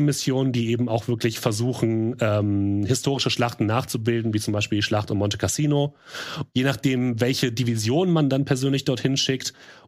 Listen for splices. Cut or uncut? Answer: cut